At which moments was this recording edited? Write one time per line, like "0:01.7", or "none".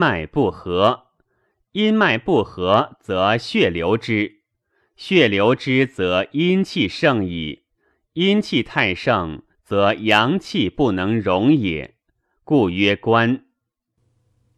none